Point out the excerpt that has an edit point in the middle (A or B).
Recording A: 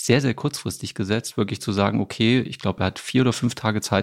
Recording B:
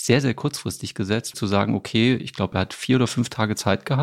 B